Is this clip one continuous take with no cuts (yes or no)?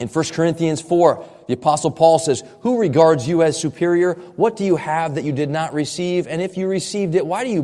yes